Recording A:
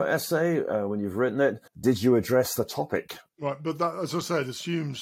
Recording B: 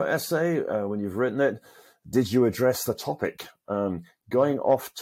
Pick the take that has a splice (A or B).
A